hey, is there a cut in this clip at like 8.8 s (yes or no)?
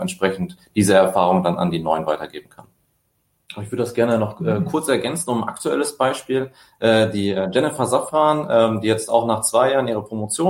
no